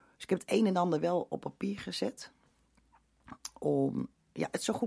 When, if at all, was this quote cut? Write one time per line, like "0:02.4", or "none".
none